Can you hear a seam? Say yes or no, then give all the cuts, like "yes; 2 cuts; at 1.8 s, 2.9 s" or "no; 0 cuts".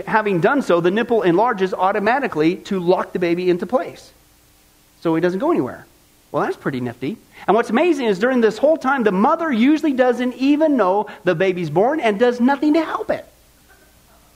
no; 0 cuts